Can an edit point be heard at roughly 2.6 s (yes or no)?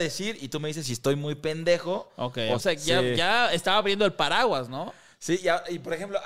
yes